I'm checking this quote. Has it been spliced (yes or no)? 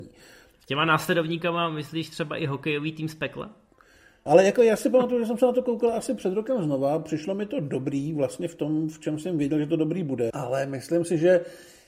yes